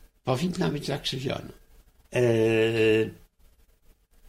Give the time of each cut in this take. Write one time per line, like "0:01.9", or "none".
0:02.0